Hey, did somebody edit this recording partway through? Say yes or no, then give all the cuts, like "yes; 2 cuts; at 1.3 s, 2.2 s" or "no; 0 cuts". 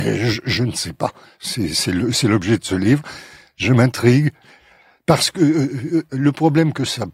no; 0 cuts